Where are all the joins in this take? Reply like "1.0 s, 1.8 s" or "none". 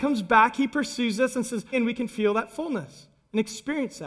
1.7 s